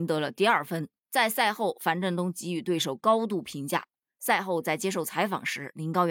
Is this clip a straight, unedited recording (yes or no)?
no